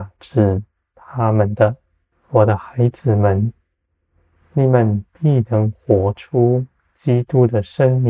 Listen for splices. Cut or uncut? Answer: cut